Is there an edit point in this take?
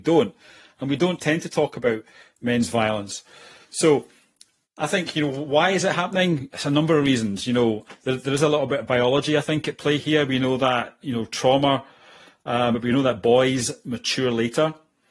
yes; 1 cut; at 12.7 s

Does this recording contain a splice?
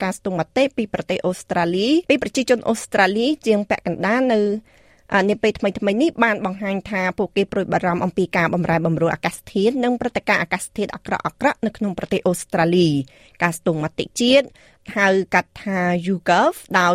yes; 1 cut; at 2.0 s

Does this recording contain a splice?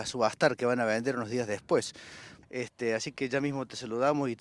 yes; 1 cut; at 2.4 s

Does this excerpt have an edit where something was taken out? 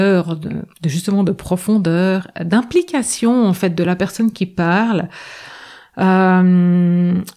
no; 0 cuts

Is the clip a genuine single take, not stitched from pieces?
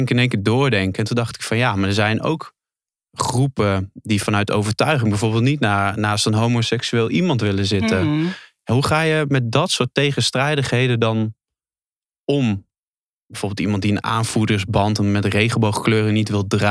yes; 0 cuts

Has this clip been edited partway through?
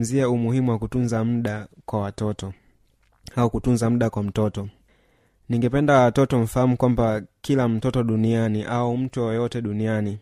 no; 0 cuts

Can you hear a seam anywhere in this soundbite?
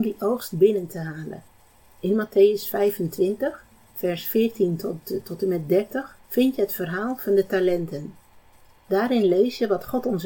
yes; 1 cut; at 6.2 s

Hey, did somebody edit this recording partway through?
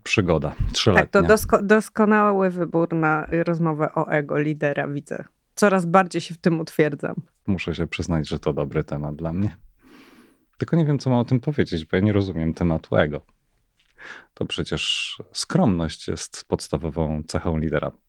no; 0 cuts

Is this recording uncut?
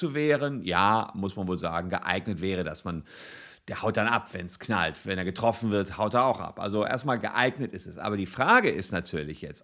yes; 0 cuts

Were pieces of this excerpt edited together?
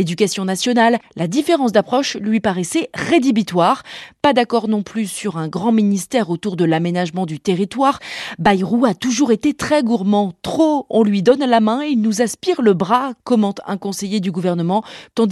no; 0 cuts

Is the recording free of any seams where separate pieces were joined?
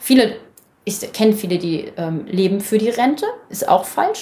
yes; 0 cuts

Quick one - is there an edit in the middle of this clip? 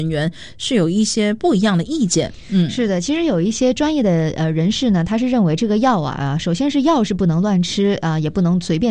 no; 0 cuts

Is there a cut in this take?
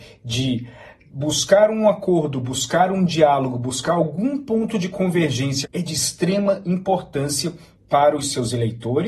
yes; 1 cut; at 5.6 s

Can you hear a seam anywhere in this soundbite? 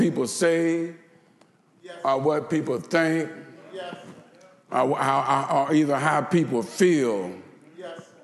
no; 0 cuts

